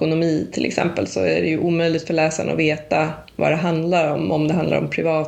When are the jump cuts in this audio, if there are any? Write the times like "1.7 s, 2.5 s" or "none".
none